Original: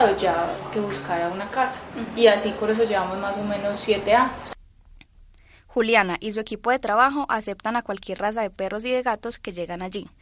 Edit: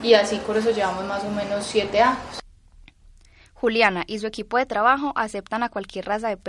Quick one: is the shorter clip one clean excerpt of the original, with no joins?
yes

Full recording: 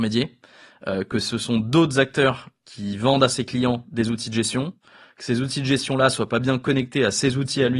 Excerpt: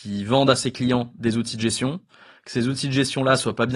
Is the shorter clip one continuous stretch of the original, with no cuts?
yes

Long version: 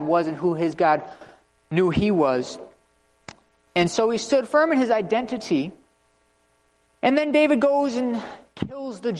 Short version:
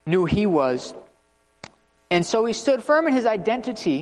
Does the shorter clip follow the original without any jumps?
yes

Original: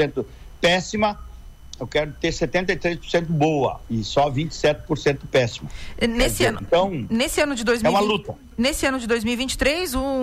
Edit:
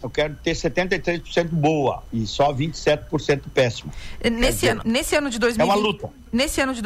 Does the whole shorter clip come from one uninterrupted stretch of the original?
no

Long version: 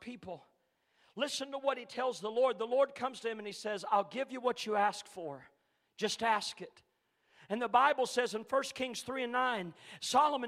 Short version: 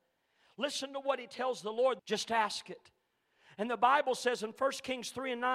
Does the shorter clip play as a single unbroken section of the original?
no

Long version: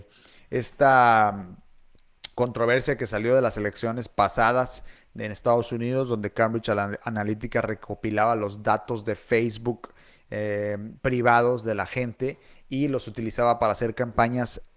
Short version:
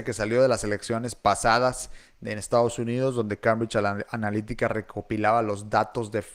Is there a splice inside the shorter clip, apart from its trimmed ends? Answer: no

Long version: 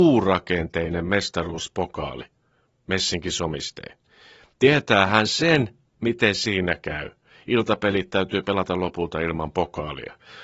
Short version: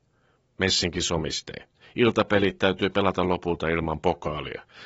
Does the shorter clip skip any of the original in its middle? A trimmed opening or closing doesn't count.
yes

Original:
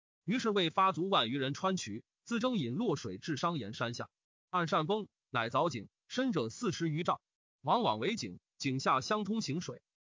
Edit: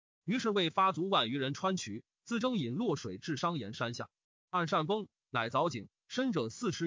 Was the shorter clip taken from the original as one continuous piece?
yes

